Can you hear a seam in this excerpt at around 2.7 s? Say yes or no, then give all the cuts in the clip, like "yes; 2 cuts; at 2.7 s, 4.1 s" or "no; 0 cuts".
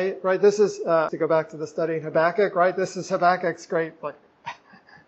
no; 1 cut; at 1.1 s